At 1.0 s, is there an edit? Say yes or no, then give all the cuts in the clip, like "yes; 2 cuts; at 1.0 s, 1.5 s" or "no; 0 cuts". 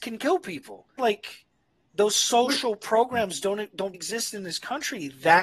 yes; 2 cuts; at 1.0 s, 3.9 s